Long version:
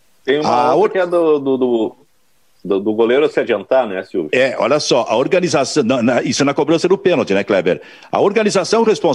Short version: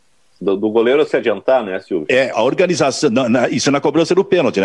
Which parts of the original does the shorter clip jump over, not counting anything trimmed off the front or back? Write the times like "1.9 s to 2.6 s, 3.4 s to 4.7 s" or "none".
4.6 s to 5.1 s